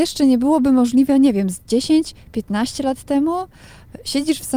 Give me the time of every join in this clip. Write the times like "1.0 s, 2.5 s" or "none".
none